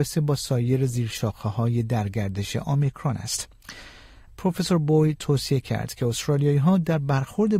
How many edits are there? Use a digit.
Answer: 1